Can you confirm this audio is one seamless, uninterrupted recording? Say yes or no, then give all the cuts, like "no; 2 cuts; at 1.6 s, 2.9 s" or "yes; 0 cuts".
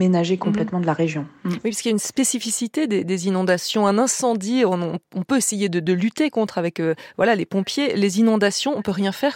yes; 0 cuts